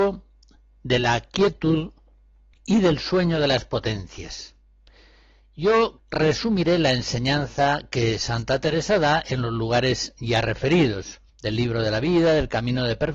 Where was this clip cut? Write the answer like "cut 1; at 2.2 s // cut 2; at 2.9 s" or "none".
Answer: cut 1; at 6.0 s // cut 2; at 11.3 s